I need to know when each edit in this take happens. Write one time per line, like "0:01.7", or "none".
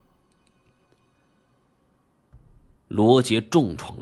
0:02.8